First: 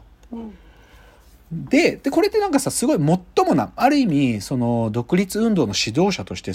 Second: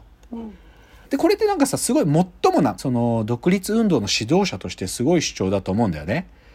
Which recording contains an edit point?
second; 2 cuts; at 1.0 s, 2.8 s

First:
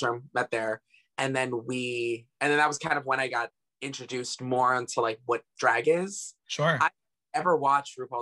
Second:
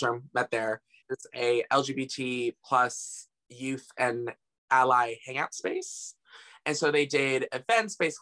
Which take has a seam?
second; 1 cut; at 1.0 s

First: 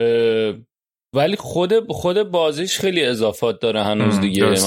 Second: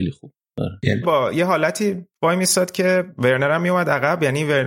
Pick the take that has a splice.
second; 1 cut; at 1.0 s

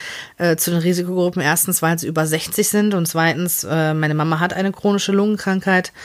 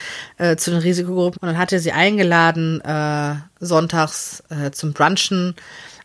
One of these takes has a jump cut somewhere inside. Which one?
second; 1 cut; at 1.3 s

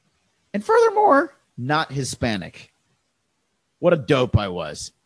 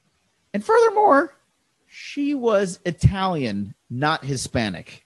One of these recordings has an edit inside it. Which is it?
first; 1 cut; at 1.5 s

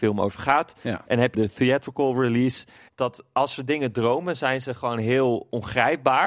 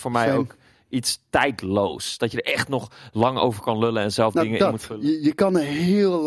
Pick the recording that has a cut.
first; 2 cuts; at 1.3 s, 2.9 s

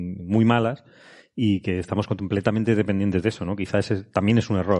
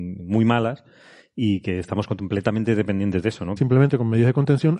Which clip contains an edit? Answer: second; 1 cut; at 3.6 s

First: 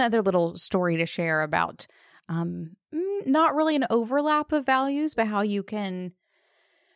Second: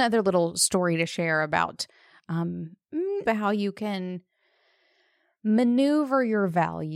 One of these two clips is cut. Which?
second; 1 cut; at 3.2 s

